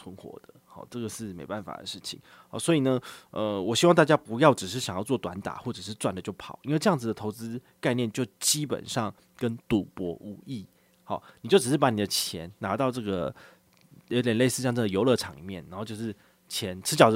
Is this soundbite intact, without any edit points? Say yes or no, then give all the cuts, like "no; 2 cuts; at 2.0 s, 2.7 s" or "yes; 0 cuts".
yes; 0 cuts